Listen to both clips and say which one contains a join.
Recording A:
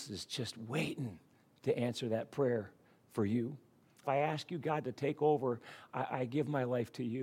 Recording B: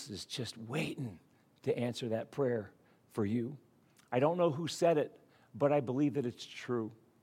A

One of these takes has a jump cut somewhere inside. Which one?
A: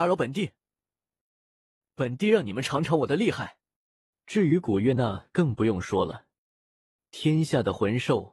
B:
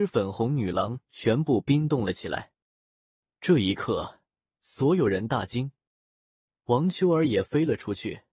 A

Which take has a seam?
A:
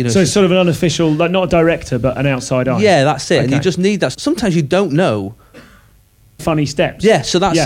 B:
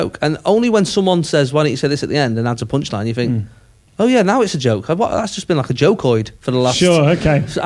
A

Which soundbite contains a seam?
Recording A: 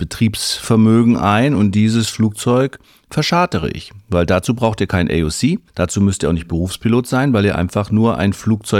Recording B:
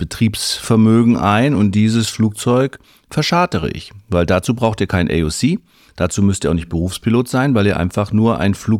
A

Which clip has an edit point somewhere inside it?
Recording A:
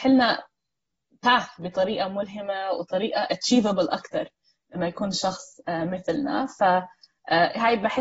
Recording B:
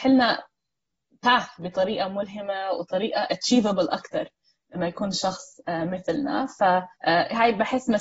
B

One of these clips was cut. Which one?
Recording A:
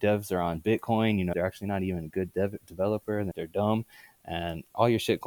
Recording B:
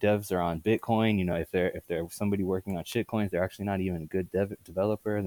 A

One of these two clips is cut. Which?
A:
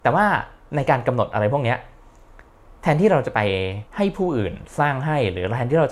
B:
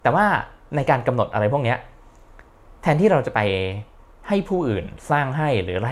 A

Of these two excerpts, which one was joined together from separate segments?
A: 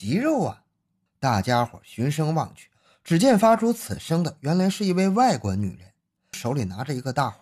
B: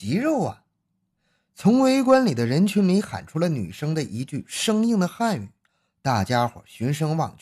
A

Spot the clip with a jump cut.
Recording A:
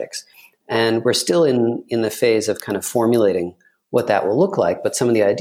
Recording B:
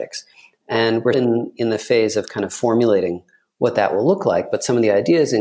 B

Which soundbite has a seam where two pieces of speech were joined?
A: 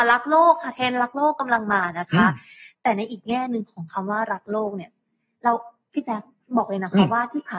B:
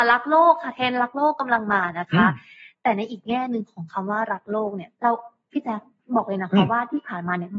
B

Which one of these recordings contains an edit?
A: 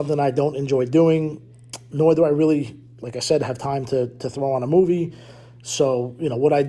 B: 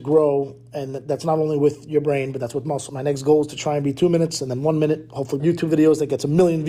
B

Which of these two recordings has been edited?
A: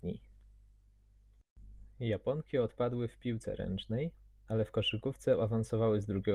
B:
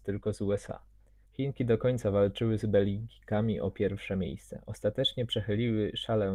B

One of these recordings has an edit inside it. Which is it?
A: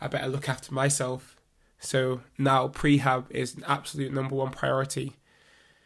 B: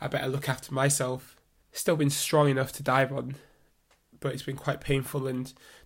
B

